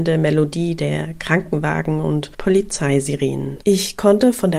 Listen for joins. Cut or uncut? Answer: cut